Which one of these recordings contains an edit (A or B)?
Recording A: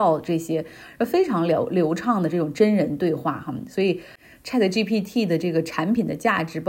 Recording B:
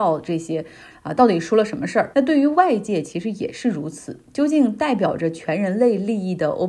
B